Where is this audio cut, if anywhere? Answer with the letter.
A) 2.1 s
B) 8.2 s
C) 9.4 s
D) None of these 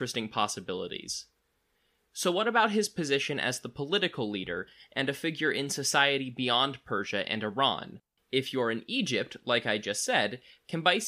B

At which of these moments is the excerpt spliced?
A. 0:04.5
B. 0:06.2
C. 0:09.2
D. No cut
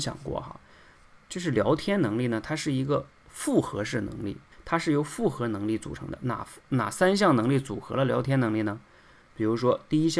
A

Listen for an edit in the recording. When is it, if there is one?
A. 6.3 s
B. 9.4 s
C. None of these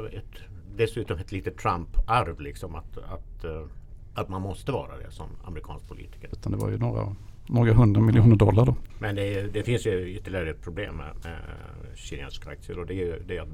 A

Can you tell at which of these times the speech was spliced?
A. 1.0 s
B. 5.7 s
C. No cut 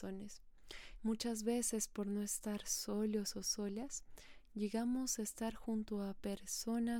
A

